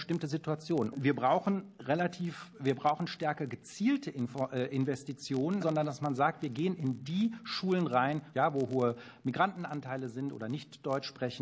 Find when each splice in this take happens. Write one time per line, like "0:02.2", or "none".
0:00.9
0:05.6
0:08.3